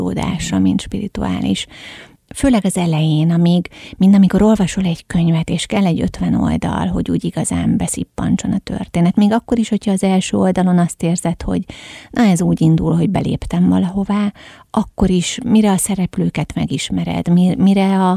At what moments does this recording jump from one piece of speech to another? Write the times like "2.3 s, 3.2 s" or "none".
none